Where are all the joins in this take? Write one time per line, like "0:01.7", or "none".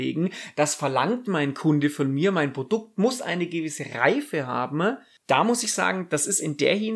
none